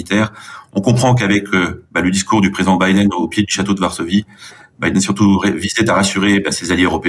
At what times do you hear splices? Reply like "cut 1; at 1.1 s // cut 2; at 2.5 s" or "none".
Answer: none